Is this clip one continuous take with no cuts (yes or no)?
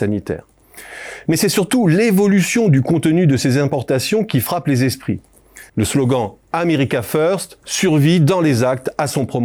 no